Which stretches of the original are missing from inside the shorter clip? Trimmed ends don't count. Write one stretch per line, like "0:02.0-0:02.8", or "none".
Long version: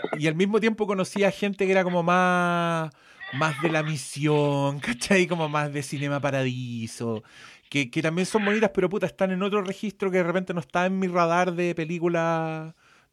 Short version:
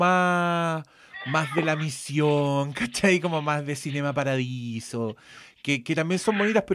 none

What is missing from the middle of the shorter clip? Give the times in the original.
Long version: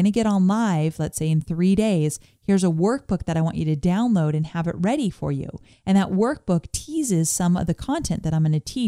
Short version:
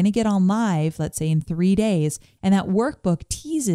0:02.4-0:05.8

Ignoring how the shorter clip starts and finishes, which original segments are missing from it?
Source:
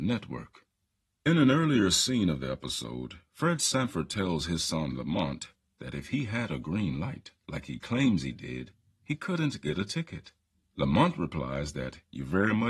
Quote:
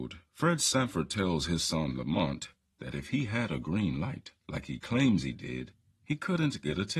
none

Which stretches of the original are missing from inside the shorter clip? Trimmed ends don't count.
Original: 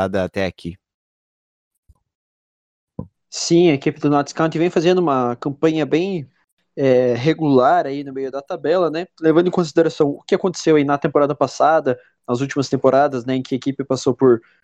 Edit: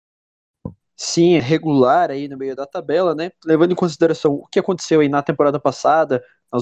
0:03.7-0:07.1

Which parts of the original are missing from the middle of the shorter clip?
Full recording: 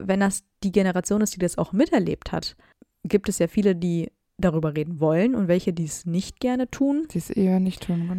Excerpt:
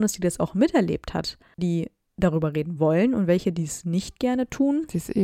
0:02.8-0:03.8

